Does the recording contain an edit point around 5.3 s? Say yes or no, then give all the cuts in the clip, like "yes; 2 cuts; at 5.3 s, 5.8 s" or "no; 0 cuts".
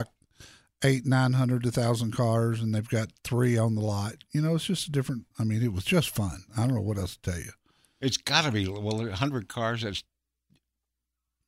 yes; 1 cut; at 5.3 s